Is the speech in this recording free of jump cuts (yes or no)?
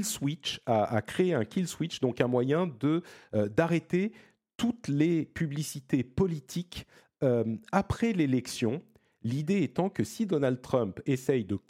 yes